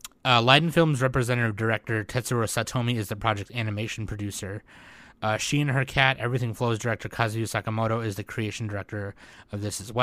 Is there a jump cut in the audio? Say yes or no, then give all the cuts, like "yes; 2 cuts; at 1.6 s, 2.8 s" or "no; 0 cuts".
no; 0 cuts